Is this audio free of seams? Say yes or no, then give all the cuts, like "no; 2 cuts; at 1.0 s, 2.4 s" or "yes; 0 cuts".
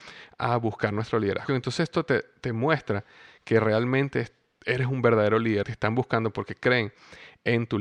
no; 2 cuts; at 1.5 s, 5.6 s